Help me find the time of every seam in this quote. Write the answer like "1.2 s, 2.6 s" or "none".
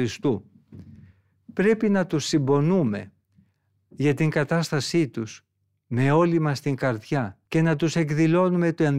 7.5 s